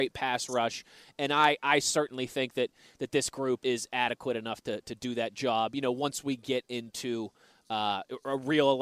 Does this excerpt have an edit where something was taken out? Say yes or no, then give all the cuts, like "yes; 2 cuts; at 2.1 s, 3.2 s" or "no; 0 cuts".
yes; 1 cut; at 3.6 s